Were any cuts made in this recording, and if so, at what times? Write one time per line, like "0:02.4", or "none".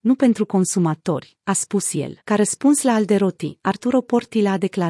0:02.2